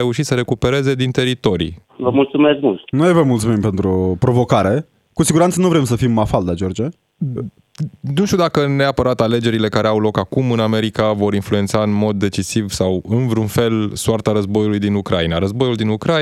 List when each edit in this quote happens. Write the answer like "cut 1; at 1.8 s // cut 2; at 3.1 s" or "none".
cut 1; at 1.8 s